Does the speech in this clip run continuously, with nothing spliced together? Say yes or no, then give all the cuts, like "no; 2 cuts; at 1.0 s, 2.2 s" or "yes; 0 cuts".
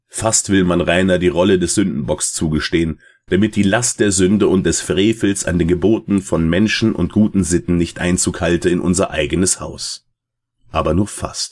no; 1 cut; at 3.3 s